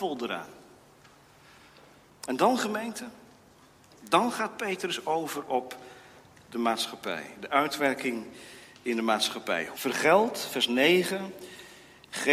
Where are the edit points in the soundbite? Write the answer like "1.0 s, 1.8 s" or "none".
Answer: 2.1 s, 9.7 s

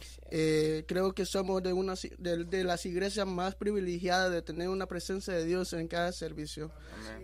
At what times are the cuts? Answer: none

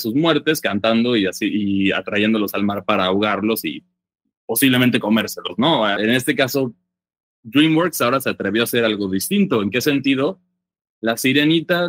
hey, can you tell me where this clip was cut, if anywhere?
6.0 s

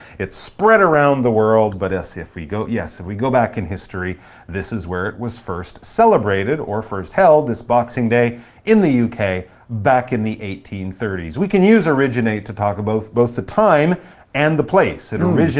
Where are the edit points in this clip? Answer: none

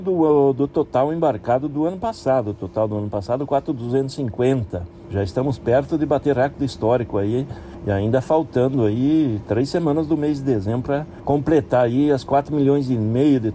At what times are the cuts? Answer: none

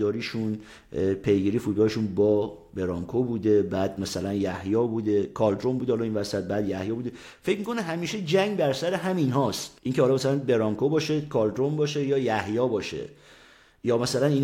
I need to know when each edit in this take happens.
9.8 s

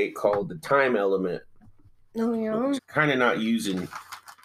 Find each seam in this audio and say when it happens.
2.8 s

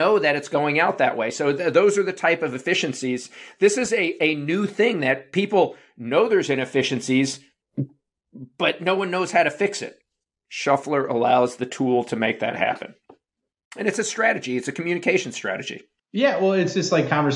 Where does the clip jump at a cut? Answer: none

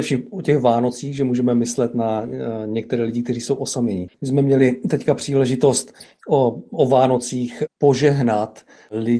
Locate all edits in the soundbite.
4.1 s

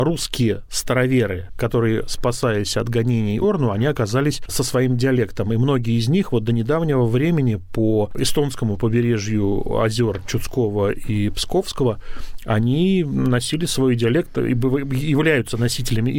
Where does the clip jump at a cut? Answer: 3.4 s

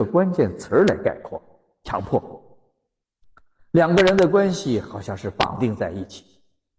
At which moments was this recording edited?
none

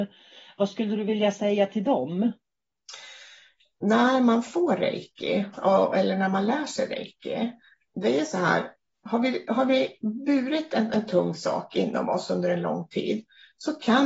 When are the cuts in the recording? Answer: none

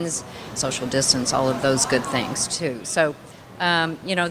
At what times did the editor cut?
none

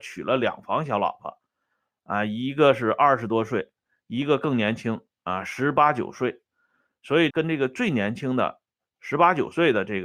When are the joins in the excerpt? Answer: 7.3 s

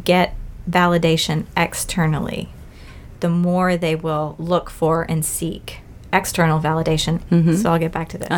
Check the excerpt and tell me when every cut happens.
7.3 s

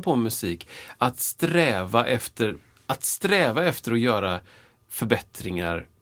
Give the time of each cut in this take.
none

